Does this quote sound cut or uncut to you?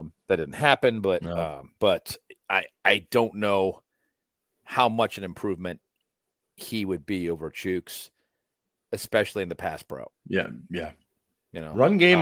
cut